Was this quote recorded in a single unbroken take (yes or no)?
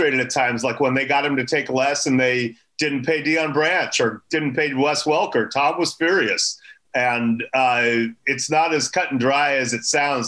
yes